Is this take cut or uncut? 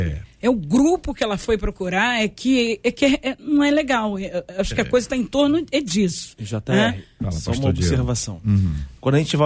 uncut